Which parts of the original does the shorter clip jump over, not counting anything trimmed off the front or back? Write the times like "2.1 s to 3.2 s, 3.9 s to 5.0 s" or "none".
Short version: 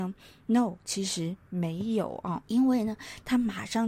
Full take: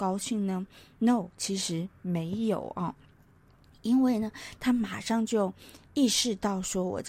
3.0 s to 3.8 s